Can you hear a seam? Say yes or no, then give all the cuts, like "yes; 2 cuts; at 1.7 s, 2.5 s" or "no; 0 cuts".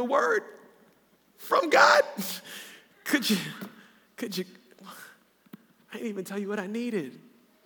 no; 0 cuts